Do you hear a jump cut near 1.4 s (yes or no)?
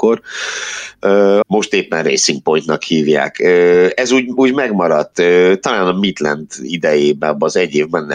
yes